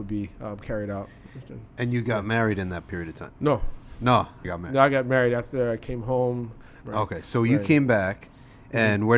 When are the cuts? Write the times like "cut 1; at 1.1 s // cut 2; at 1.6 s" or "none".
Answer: cut 1; at 4.4 s // cut 2; at 6.8 s